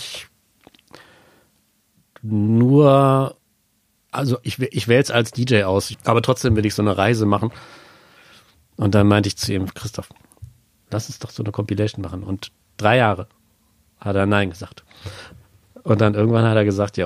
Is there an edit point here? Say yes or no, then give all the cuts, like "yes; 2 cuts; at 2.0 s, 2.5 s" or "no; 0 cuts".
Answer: yes; 2 cuts; at 5.9 s, 8.7 s